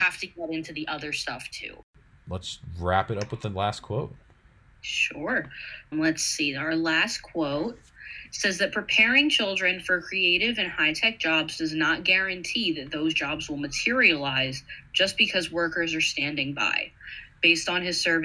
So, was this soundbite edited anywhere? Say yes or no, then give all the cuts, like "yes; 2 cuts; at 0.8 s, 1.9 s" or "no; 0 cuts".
yes; 1 cut; at 5.9 s